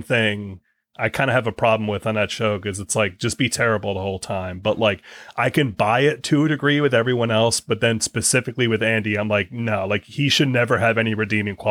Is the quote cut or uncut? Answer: uncut